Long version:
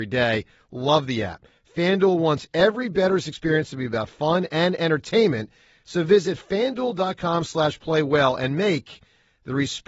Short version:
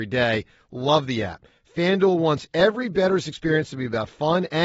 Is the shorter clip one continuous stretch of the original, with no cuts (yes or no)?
yes